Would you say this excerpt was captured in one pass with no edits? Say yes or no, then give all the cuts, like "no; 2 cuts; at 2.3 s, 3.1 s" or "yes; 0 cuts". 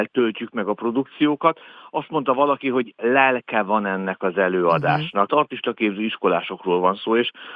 no; 1 cut; at 5.3 s